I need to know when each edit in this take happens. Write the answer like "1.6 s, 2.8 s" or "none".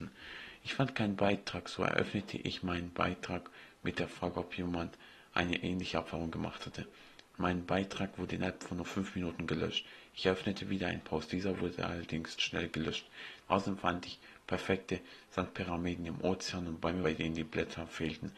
13.4 s, 17.0 s